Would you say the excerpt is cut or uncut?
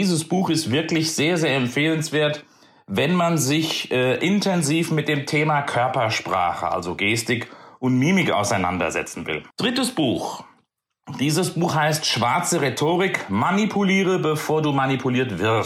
cut